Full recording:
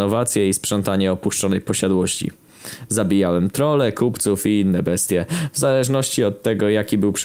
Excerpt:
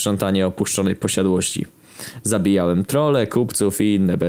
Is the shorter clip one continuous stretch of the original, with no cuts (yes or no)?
yes